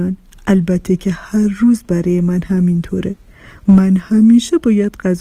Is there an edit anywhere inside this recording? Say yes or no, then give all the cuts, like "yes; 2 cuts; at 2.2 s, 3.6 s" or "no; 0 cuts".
no; 0 cuts